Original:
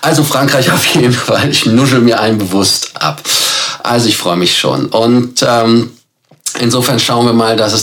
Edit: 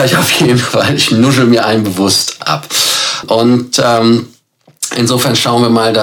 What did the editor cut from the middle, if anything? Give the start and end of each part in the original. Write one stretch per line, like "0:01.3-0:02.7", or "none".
0:03.8-0:04.9